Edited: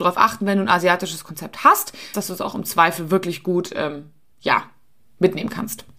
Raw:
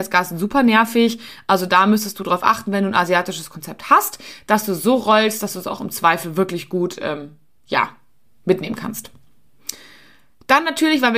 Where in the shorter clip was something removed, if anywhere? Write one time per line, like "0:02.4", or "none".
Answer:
0:02.1